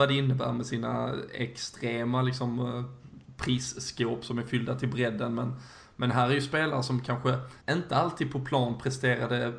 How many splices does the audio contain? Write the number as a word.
one